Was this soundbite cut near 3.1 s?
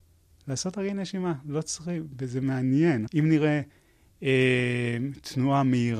yes; 1 cut; at 3.1 s

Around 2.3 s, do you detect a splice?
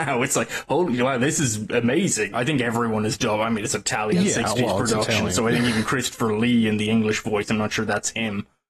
yes; 1 cut; at 2.3 s

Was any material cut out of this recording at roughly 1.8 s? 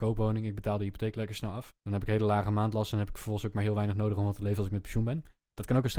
yes; 1 cut; at 1.8 s

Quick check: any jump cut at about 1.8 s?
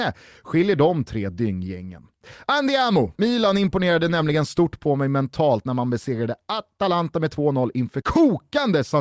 no; 2 cuts; at 3.2 s, 8.0 s

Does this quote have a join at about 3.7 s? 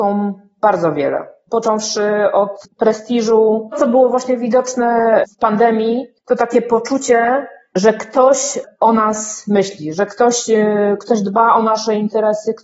yes; 1 cut; at 3.7 s

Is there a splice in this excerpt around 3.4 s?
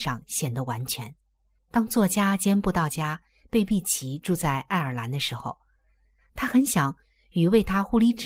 no; 1 cut; at 1.6 s

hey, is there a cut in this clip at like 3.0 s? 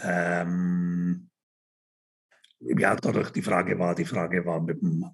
yes; 1 cut; at 3.0 s

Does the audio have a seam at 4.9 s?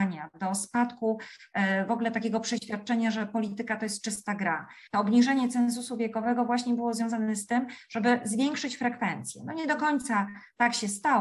yes; 1 cut; at 4.9 s

